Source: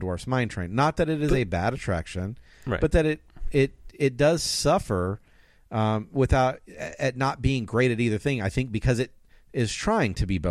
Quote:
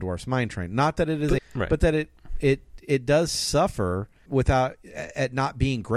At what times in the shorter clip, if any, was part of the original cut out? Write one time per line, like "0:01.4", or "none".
0:01.4
0:04.3